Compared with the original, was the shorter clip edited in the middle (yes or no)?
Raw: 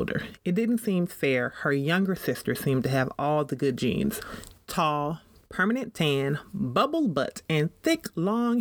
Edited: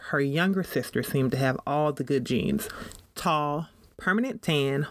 no